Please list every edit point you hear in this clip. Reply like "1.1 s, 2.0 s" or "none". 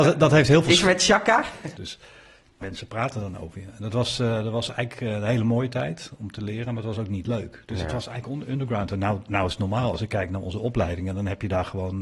1.8 s